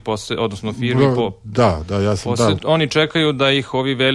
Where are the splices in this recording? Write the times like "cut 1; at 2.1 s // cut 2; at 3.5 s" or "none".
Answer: cut 1; at 2.6 s